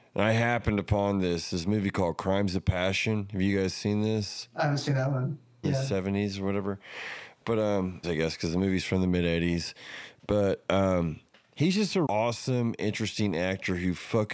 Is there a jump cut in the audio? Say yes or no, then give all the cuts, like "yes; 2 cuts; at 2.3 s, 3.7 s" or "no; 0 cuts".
yes; 3 cuts; at 5.6 s, 8.0 s, 12.1 s